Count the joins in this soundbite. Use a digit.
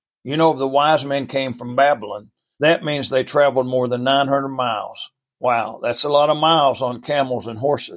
1